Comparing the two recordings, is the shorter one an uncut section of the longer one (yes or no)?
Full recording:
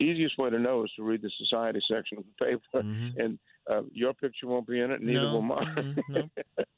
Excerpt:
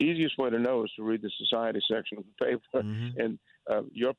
yes